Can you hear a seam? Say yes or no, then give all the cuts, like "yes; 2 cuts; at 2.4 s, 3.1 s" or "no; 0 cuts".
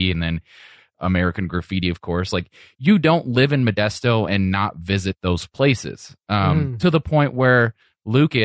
no; 0 cuts